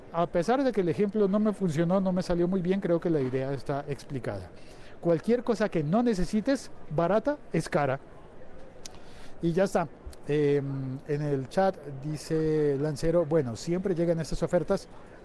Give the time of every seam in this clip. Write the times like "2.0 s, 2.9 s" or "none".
none